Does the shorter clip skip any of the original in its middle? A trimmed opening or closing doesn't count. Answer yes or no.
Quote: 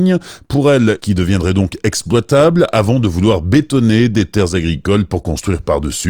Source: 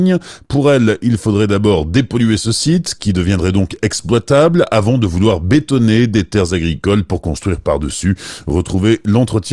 yes